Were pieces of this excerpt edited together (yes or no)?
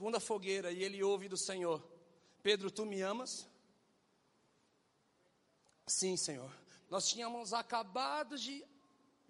yes